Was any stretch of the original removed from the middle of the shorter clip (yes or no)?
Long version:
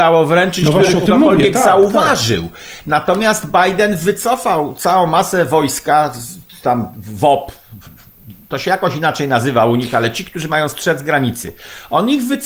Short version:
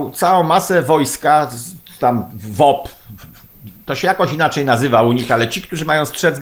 no